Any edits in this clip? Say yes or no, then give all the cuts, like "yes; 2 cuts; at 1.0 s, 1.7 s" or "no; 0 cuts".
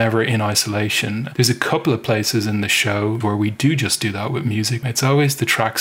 yes; 2 cuts; at 3.2 s, 4.8 s